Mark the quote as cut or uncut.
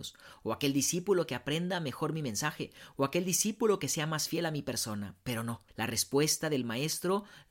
cut